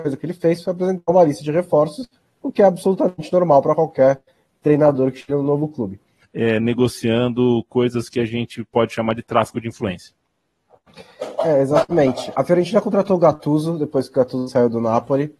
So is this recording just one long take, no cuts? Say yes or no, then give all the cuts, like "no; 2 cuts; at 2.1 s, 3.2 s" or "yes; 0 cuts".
no; 2 cuts; at 6.2 s, 12.3 s